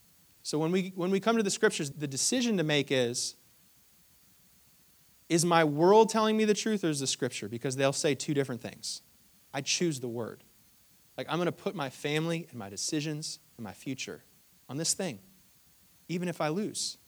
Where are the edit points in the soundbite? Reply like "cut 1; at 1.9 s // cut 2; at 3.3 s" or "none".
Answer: cut 1; at 1.9 s // cut 2; at 9.4 s